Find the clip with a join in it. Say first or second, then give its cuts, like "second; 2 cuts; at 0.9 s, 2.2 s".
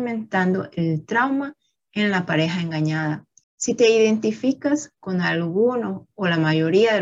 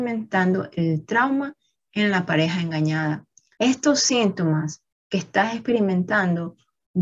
first; 1 cut; at 3.4 s